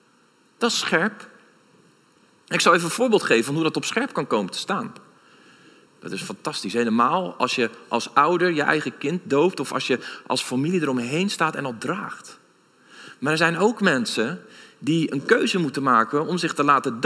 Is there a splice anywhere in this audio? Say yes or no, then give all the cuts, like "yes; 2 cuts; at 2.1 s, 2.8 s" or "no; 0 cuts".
yes; 1 cut; at 5.9 s